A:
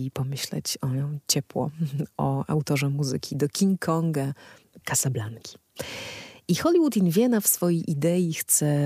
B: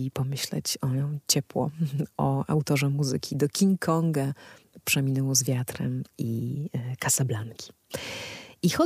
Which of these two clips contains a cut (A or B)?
A